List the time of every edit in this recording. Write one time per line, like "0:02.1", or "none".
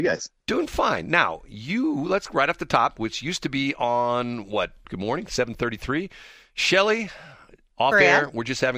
0:03.0
0:04.8